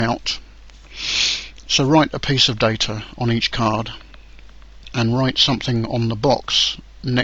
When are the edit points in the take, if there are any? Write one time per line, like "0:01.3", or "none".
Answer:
0:01.7